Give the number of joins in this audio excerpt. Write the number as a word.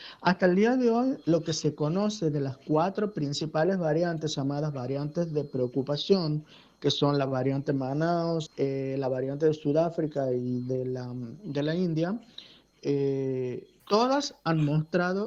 two